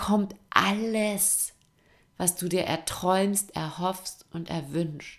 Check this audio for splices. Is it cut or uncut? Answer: uncut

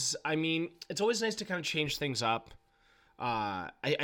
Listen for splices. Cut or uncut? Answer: uncut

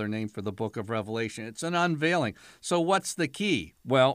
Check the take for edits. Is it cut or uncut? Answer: uncut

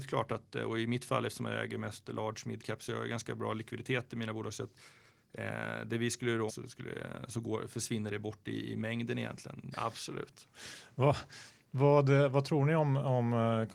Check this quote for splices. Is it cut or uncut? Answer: cut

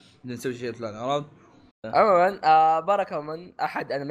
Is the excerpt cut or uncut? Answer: cut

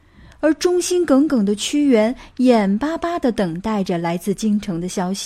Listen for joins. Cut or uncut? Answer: uncut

